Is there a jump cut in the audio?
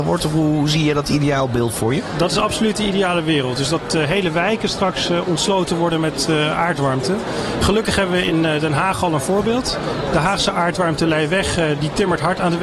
no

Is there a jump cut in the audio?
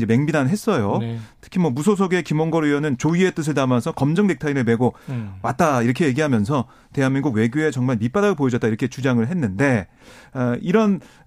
no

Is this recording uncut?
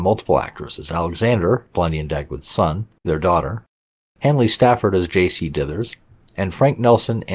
no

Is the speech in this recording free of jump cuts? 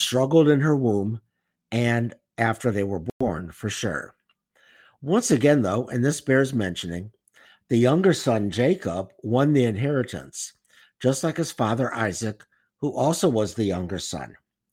yes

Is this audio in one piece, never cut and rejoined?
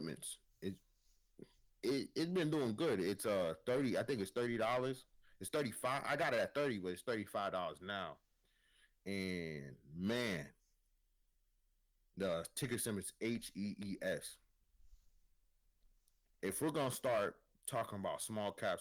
no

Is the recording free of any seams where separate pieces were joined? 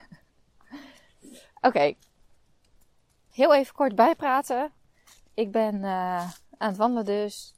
yes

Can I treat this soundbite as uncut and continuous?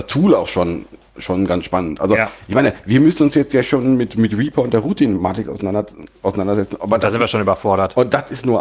yes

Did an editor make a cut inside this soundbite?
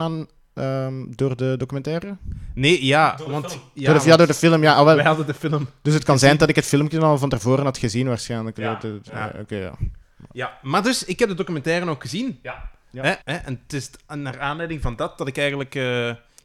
yes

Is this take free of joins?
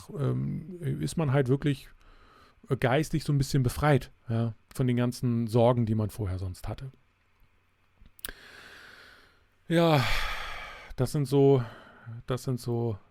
no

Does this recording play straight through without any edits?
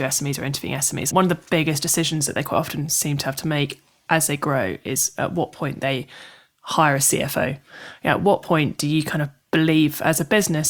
no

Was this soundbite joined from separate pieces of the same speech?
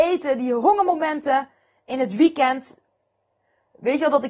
no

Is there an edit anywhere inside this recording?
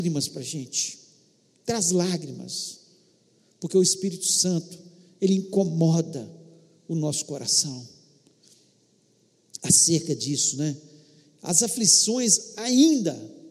no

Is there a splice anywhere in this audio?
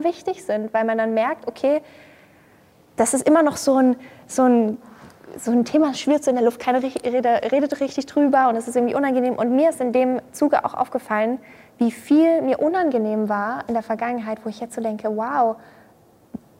no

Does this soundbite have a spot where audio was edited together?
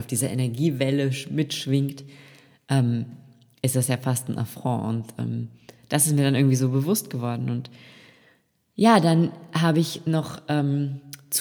no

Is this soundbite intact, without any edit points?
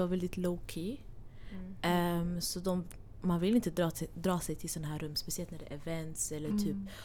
yes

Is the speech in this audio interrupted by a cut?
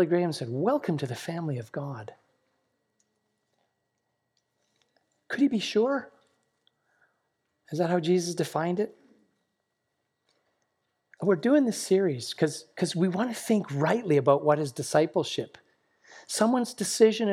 no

